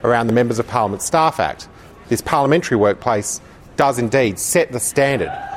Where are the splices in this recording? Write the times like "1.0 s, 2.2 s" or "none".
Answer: 2.0 s